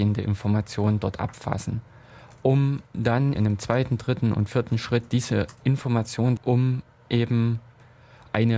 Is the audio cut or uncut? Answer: cut